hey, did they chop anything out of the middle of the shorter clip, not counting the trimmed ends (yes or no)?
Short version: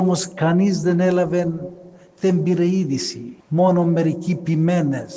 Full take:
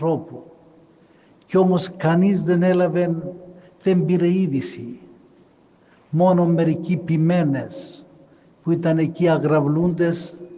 yes